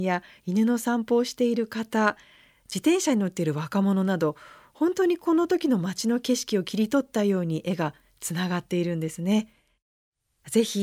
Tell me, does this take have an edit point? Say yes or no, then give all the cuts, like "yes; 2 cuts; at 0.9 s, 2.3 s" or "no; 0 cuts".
no; 0 cuts